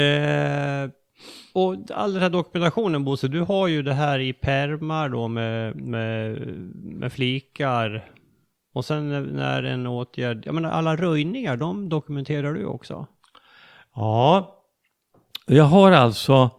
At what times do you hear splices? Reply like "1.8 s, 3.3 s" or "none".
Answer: none